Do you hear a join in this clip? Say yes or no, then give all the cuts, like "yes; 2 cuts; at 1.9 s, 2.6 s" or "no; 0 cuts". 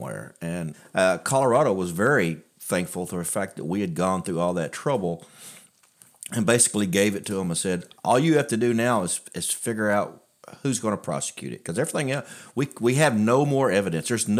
no; 0 cuts